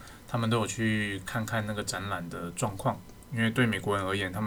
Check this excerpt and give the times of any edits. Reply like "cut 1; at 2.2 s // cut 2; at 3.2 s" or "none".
none